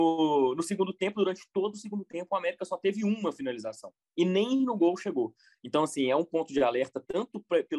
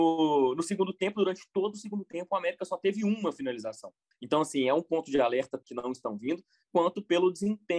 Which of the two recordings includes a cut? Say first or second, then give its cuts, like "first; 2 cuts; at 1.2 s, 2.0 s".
second; 2 cuts; at 4.1 s, 5.6 s